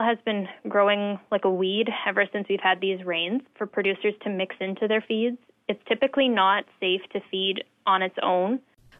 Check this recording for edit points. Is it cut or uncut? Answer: cut